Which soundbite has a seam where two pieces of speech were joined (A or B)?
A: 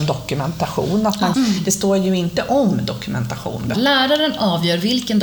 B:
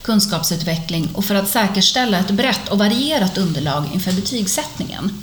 A